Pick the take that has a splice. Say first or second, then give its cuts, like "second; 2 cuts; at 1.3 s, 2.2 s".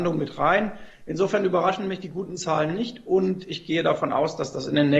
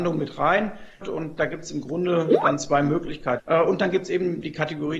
second; 2 cuts; at 1.0 s, 3.4 s